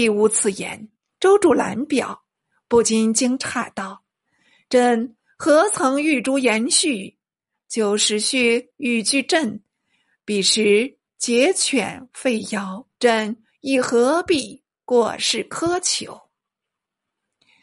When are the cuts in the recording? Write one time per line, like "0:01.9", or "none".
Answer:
0:01.1
0:12.9